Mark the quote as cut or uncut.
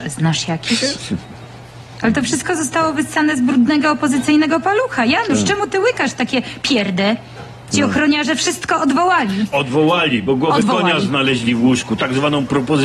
uncut